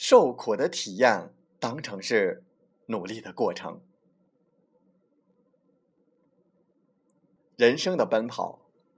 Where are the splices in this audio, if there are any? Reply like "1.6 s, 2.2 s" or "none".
7.4 s